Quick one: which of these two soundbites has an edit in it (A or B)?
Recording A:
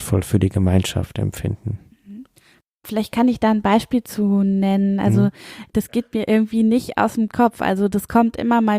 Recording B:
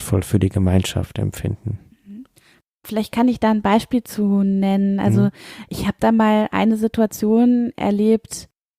A